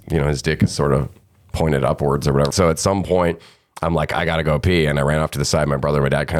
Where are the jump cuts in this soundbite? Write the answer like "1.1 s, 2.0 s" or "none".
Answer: 2.5 s